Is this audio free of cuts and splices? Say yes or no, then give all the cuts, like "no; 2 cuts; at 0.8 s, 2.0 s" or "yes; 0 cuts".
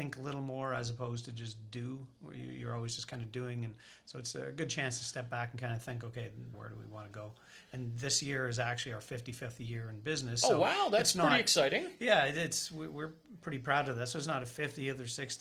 no; 1 cut; at 6.5 s